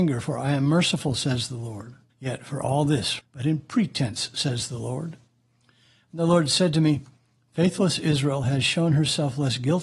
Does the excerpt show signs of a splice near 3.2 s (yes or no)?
yes